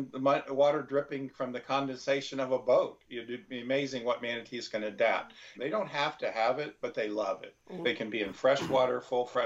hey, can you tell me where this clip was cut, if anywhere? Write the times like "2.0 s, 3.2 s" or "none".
5.6 s, 7.8 s